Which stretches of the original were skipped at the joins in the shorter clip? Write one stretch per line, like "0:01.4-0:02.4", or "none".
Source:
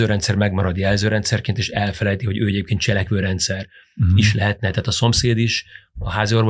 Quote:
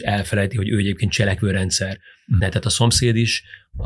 0:04.1-0:04.6